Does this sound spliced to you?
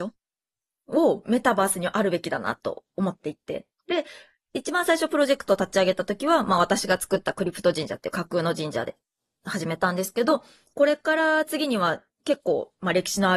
no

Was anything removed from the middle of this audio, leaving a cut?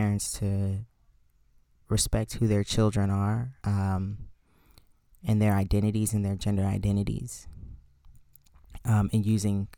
yes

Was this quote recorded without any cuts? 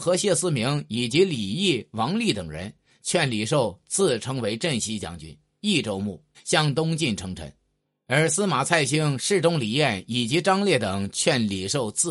no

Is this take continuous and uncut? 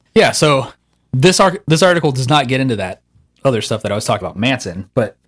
no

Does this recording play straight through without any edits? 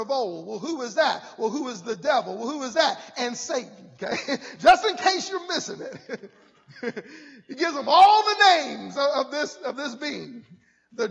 yes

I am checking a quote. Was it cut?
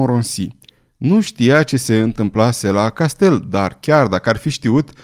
no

